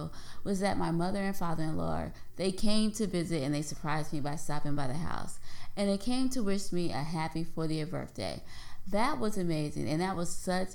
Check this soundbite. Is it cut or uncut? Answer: uncut